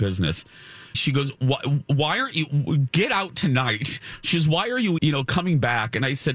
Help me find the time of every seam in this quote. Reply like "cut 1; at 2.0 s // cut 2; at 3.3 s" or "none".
cut 1; at 0.9 s // cut 2; at 5.0 s